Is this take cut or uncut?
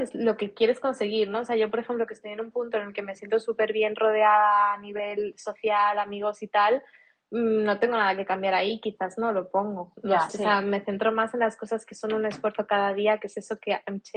cut